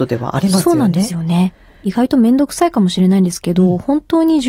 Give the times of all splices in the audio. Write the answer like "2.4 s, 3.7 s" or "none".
none